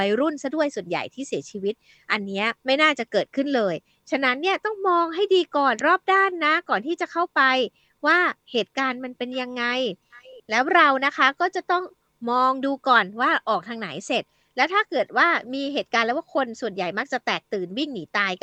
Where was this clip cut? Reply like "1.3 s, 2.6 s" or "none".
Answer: 2.6 s